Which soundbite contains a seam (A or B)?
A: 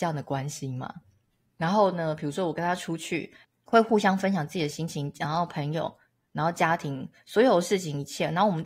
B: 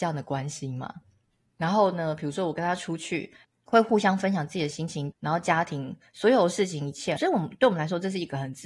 B